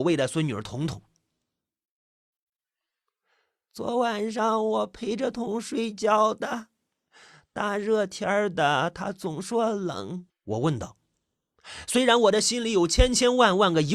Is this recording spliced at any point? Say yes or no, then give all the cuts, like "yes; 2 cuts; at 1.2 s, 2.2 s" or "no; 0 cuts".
yes; 2 cuts; at 5.3 s, 10.3 s